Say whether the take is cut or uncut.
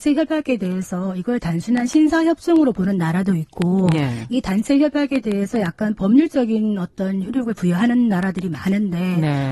uncut